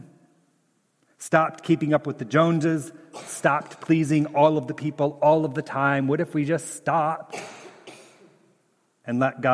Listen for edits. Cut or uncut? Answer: uncut